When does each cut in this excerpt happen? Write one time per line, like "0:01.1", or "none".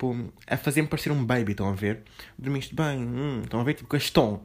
none